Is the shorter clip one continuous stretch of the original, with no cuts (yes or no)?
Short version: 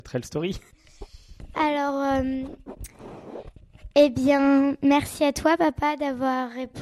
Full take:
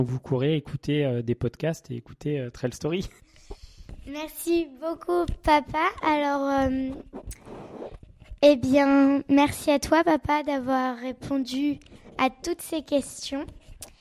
no